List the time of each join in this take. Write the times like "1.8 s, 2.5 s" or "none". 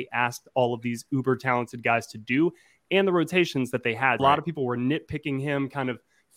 4.2 s